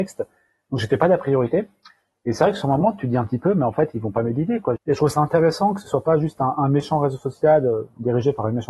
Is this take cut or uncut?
cut